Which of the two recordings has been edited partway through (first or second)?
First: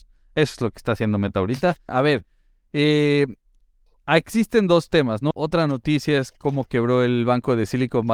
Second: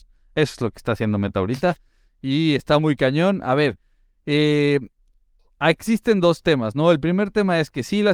first